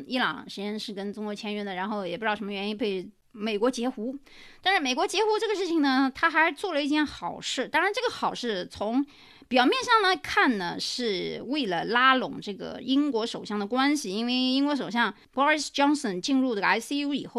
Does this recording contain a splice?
no; 0 cuts

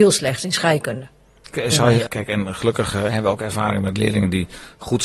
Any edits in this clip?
yes; 1 cut; at 2.1 s

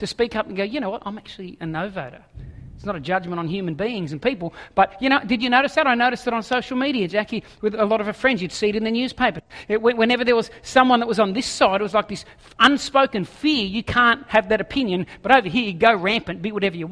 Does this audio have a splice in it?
no; 0 cuts

